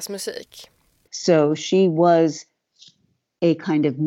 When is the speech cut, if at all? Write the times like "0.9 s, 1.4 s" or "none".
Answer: 1.1 s